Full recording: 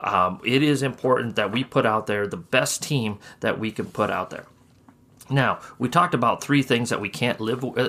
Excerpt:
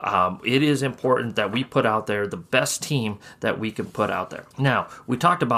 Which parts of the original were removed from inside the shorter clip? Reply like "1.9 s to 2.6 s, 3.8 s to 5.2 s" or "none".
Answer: 4.5 s to 5.2 s